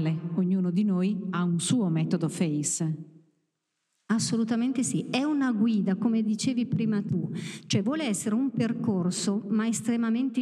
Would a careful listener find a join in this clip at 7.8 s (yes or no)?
no